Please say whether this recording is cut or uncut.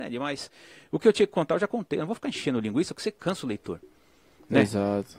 uncut